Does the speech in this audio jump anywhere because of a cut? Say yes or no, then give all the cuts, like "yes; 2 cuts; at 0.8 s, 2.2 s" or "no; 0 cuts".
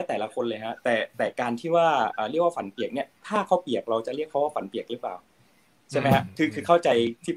no; 0 cuts